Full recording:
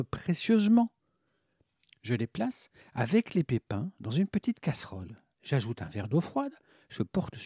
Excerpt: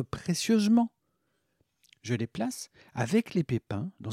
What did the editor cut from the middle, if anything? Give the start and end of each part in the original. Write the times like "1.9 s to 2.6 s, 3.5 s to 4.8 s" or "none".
none